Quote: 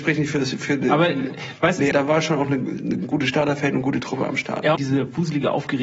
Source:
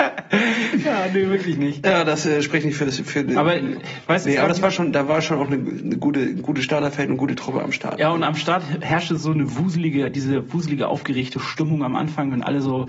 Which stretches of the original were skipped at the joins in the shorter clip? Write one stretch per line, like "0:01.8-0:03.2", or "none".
0:04.4-0:04.9
0:06.0-0:06.3
0:08.1-0:10.1